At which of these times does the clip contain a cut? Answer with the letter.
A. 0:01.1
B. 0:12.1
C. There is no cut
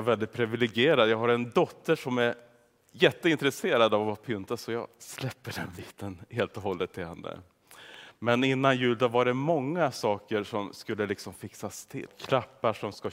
B